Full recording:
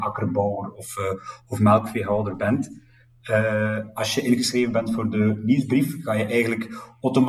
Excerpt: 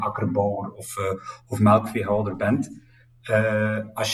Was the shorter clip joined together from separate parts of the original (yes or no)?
no